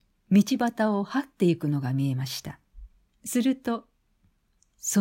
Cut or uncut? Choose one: cut